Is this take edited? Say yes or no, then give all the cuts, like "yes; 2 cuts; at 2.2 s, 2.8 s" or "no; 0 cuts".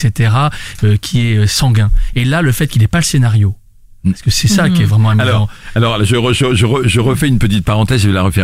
no; 0 cuts